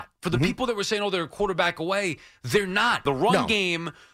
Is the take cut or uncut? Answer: cut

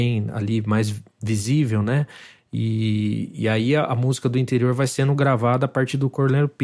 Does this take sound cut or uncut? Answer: uncut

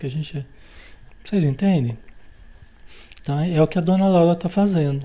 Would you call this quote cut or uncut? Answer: cut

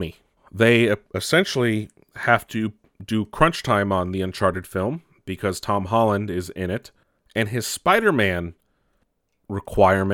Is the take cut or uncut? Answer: uncut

